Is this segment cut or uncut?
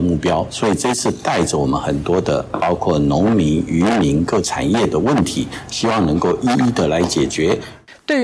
uncut